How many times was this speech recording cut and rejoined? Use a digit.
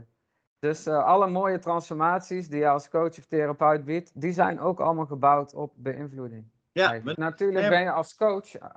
1